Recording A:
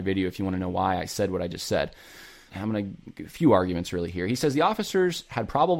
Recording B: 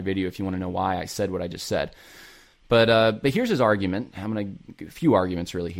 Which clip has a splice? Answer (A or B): A